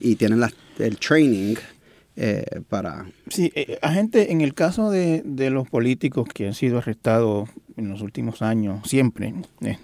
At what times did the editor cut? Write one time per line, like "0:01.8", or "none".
0:06.3
0:08.8